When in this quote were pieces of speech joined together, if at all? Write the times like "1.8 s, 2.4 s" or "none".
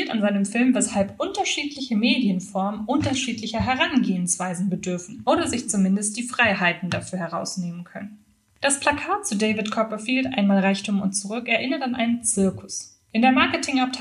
none